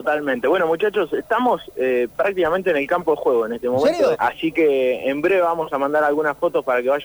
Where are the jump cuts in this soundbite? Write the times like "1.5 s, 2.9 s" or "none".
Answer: 4.1 s